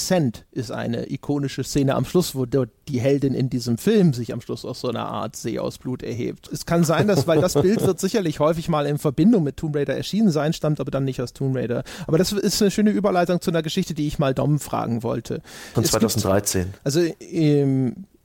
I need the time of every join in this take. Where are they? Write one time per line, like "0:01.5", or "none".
0:06.5
0:15.7